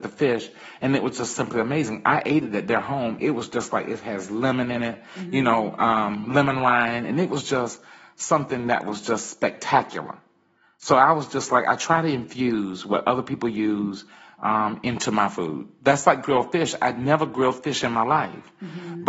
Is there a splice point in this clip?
yes; 1 cut; at 3.2 s

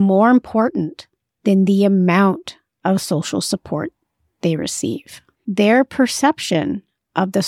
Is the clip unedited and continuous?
no; 1 cut; at 5.3 s

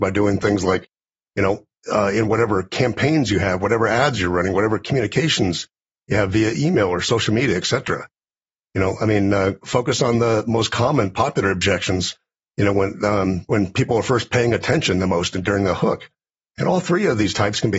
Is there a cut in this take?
yes; 1 cut; at 16.5 s

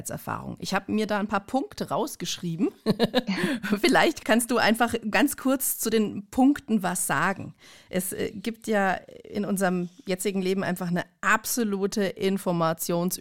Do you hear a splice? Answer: yes; 1 cut; at 3.3 s

